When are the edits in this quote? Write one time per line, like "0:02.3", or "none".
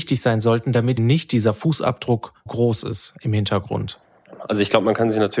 0:01.0
0:02.5